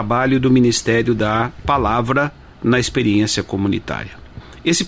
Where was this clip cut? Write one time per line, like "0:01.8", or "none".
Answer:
none